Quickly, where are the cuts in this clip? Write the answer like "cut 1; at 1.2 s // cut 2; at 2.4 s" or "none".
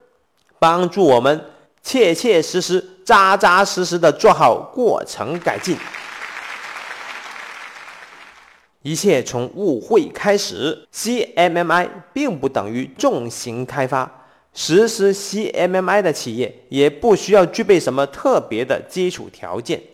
cut 1; at 8.7 s // cut 2; at 10.8 s